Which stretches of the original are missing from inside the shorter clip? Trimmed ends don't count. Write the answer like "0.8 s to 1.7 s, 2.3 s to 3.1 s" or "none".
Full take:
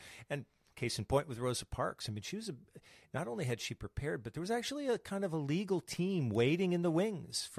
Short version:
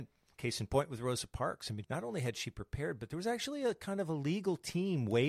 2.2 s to 3.1 s